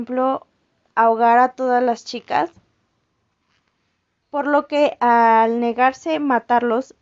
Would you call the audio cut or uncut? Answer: cut